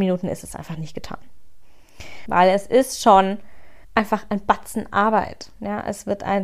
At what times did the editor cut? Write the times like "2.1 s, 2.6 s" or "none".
2.3 s, 3.8 s